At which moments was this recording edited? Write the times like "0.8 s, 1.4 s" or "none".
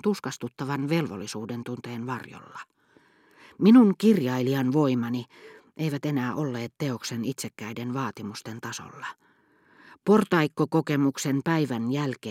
none